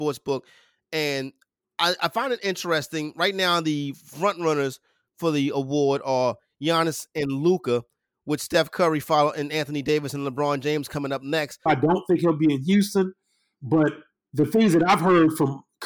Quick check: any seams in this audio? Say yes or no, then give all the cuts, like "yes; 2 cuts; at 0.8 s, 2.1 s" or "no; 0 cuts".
yes; 2 cuts; at 11.7 s, 13.5 s